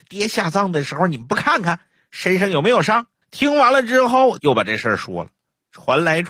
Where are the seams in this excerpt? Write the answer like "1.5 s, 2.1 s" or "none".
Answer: 3.2 s, 4.4 s